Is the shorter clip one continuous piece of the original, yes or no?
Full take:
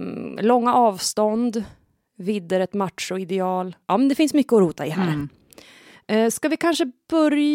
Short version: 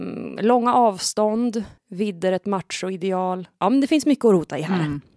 no